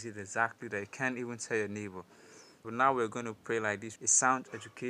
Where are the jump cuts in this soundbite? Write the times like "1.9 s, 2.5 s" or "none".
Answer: 2.6 s, 4.0 s